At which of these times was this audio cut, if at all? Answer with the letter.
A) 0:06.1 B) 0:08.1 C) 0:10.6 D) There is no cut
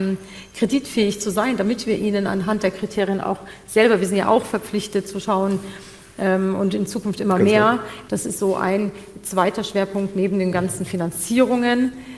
B